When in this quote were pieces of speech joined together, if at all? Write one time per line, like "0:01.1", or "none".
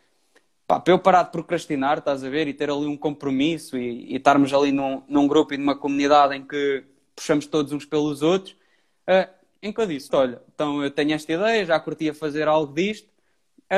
0:10.1